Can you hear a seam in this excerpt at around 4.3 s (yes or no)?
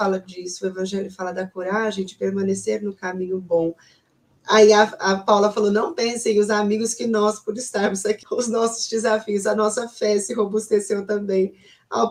no